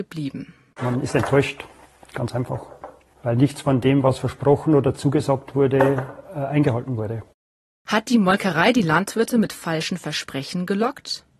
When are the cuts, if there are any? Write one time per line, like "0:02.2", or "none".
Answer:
none